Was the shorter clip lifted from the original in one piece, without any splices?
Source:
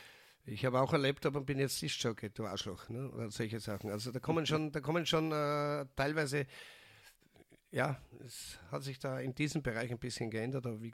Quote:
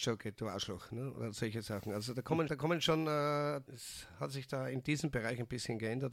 no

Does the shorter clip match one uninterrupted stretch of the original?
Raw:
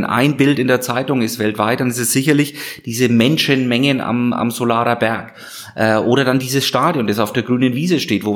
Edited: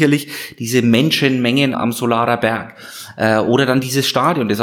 no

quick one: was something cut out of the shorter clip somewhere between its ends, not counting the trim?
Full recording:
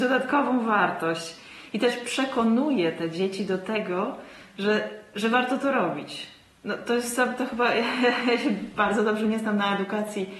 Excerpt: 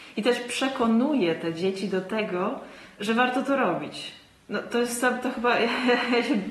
yes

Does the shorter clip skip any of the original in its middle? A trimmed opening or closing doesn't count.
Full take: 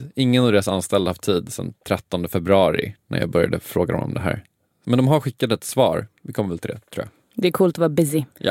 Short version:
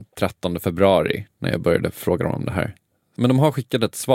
no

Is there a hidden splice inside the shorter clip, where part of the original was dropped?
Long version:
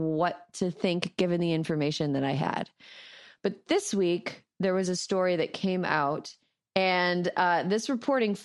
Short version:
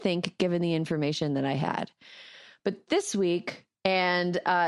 yes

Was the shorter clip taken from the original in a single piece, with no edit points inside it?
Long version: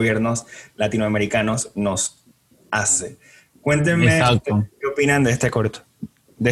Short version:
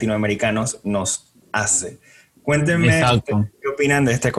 no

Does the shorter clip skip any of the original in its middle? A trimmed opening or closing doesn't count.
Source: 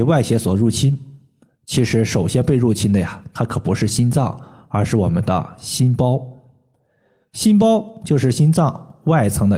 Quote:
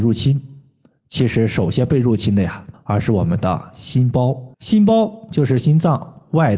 yes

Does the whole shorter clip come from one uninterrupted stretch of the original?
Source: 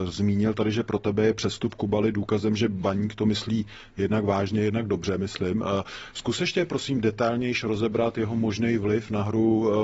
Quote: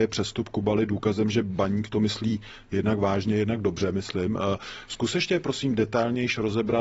yes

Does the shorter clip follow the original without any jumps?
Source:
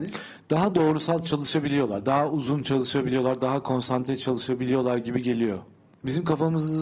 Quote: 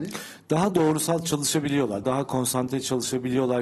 no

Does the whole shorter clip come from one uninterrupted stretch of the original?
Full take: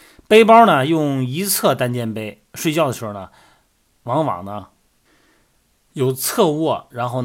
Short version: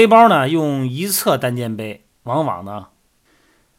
no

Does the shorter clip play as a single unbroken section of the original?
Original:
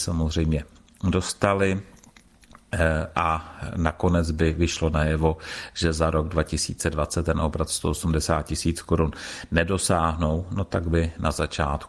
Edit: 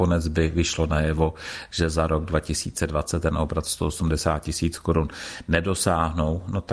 yes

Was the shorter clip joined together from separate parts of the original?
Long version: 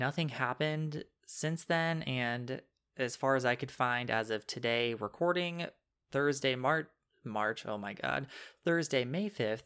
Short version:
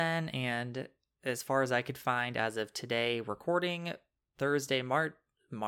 no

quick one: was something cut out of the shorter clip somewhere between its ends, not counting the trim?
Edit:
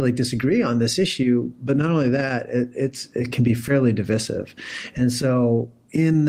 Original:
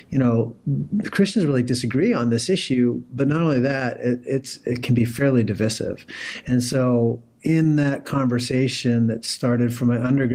no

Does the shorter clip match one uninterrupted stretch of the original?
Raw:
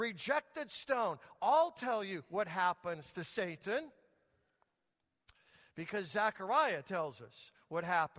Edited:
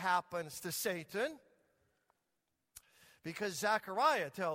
yes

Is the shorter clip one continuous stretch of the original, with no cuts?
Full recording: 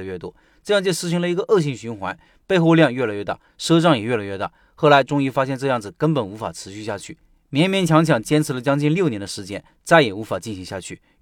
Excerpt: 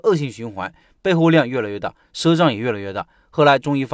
yes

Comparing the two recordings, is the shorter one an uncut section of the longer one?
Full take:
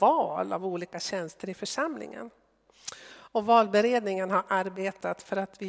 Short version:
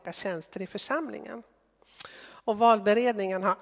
yes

